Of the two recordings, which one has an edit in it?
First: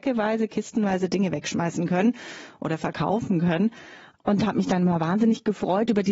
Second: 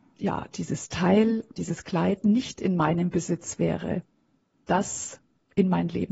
second; 2 cuts; at 1.6 s, 4.5 s

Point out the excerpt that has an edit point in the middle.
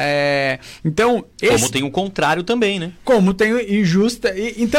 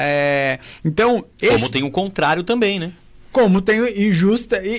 first; 1 cut; at 3.0 s

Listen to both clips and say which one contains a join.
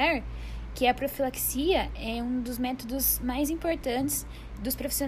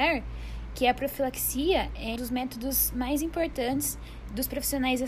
second; 1 cut; at 2.2 s

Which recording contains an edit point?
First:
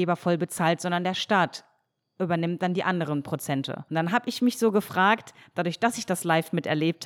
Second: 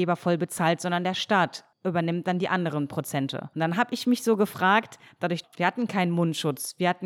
second; 2 cuts; at 1.7 s, 5.4 s

